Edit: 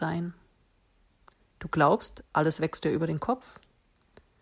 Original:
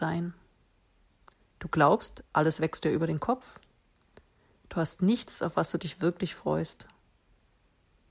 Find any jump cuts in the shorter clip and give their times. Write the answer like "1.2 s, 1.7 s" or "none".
none